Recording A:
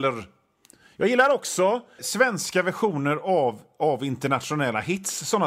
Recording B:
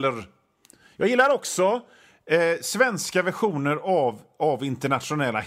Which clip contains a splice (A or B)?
A